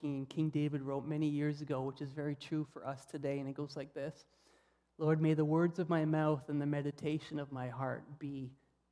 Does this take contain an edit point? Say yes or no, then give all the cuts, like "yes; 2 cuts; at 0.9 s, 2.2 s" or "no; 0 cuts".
no; 0 cuts